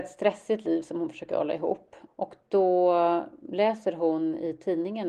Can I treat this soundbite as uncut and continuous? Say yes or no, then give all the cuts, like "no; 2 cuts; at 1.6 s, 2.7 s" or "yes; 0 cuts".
no; 1 cut; at 2.1 s